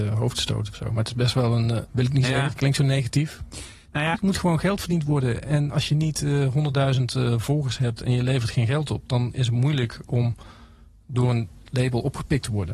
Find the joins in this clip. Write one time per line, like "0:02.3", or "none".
0:01.8
0:04.1
0:05.7